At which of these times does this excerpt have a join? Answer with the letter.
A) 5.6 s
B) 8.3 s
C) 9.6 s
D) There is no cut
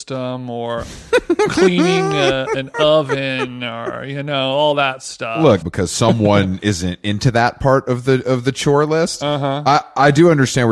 A